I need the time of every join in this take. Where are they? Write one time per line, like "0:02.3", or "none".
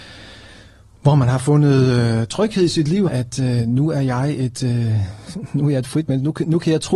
0:03.1